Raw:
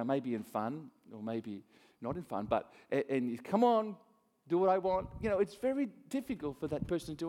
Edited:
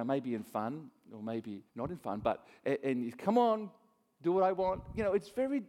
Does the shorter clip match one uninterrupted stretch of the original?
no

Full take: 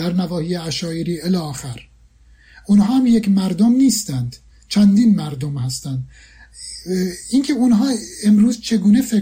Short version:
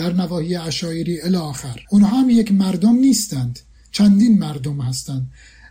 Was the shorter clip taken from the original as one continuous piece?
no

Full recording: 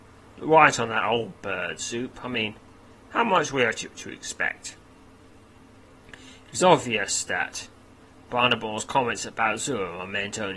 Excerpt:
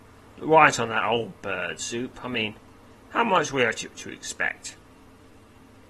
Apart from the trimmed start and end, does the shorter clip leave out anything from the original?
no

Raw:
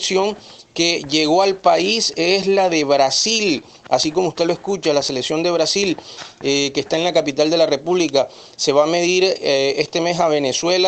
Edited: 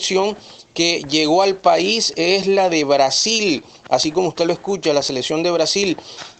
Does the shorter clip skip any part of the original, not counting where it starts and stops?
no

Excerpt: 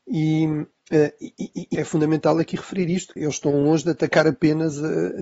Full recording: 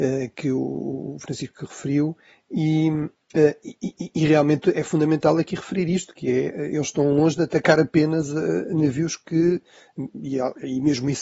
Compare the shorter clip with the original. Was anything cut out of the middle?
yes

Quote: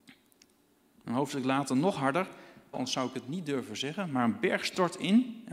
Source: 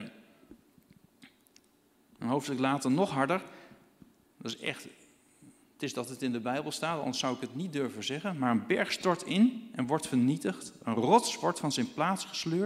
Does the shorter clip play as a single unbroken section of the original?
no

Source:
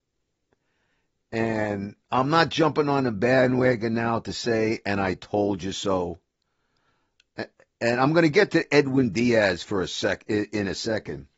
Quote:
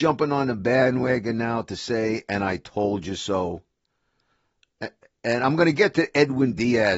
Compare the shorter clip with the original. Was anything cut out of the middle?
no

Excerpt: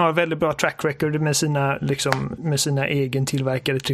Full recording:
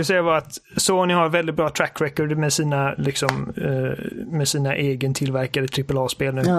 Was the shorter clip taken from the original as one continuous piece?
no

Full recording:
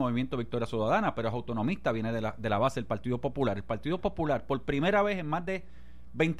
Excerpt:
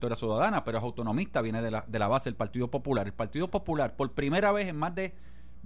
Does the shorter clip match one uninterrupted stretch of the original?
yes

